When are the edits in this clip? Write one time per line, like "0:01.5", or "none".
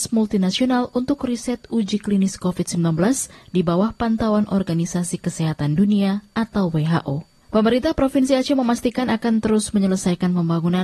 0:07.4